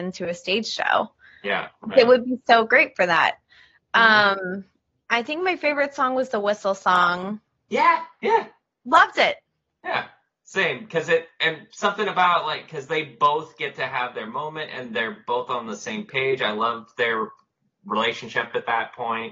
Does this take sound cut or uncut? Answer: uncut